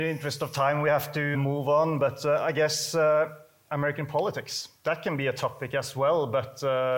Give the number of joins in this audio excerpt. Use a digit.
1